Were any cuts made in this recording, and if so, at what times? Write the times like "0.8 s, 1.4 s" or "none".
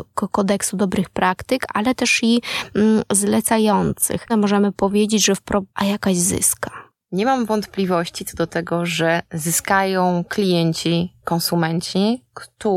4.3 s, 5.7 s